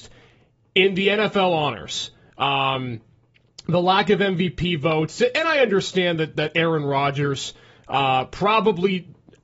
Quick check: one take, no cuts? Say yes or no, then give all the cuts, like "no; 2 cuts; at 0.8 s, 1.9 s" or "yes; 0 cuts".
yes; 0 cuts